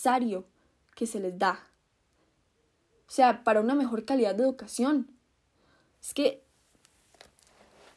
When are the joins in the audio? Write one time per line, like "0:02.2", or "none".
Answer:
none

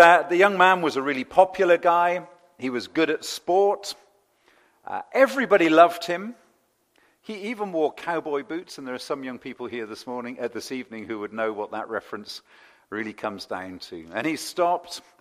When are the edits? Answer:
none

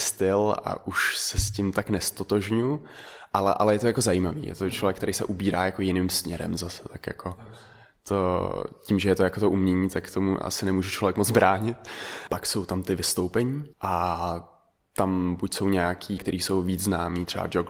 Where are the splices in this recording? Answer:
0:12.3
0:13.7
0:16.2

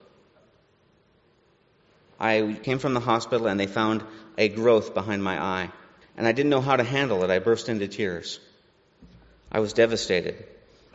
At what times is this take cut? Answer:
none

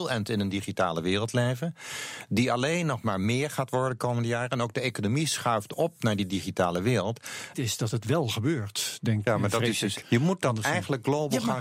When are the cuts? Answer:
0:07.5
0:10.0

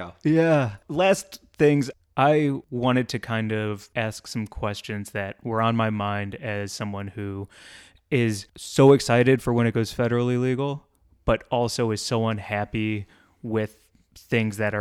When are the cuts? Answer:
none

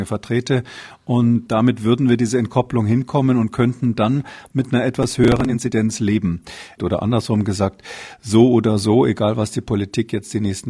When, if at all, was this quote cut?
0:01.5
0:06.8

